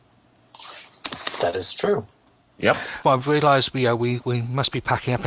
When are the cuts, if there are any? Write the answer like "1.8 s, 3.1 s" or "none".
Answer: 3.0 s